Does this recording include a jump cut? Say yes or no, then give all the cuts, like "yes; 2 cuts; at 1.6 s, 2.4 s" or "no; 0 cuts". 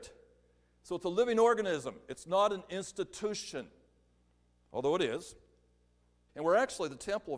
yes; 1 cut; at 6.3 s